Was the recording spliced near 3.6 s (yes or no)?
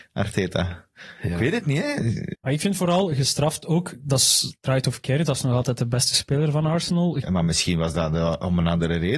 no